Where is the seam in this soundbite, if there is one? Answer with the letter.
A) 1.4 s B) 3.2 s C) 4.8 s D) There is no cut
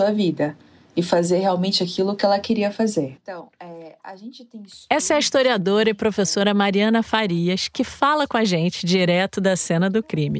B